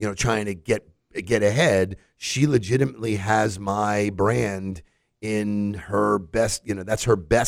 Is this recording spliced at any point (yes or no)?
no